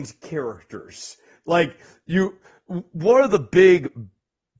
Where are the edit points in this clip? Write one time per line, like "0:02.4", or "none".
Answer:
none